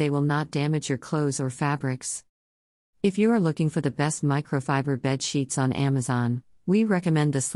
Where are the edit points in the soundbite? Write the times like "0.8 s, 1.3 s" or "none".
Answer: none